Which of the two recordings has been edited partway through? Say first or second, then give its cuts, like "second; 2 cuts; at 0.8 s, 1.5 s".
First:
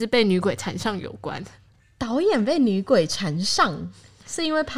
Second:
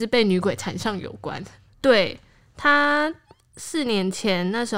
second; 1 cut; at 1.7 s